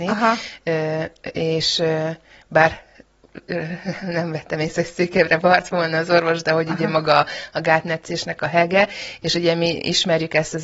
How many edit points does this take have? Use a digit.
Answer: 0